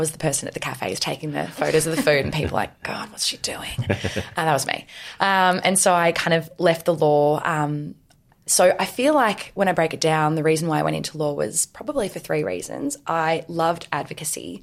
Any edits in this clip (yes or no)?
no